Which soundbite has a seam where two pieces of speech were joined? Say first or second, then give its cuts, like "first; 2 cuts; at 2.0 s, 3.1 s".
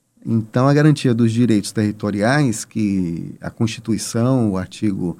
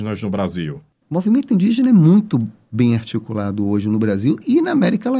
second; 1 cut; at 1.0 s